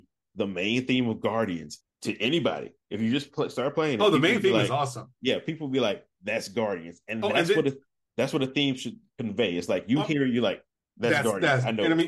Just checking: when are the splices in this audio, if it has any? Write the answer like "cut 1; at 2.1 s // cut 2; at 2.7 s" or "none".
none